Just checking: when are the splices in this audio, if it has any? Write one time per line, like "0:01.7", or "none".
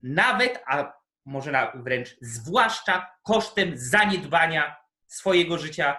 none